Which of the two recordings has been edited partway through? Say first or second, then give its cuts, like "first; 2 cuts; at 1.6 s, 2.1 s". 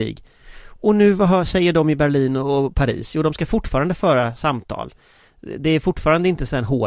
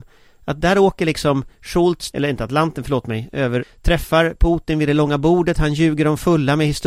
second; 2 cuts; at 2.1 s, 3.6 s